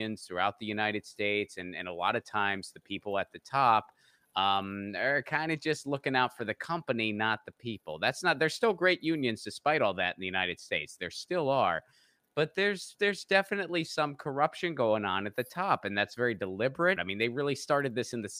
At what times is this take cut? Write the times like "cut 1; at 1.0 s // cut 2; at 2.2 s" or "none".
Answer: cut 1; at 17.0 s